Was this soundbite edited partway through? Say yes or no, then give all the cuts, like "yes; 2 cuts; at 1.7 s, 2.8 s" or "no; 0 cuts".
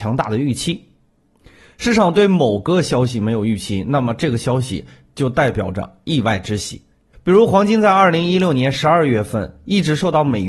yes; 1 cut; at 7.1 s